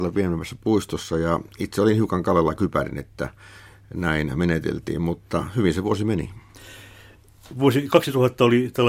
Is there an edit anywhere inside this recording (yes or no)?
no